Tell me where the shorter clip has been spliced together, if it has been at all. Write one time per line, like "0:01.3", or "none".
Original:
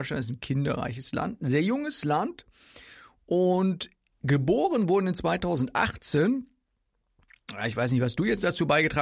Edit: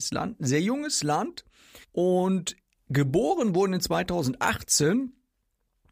0:01.8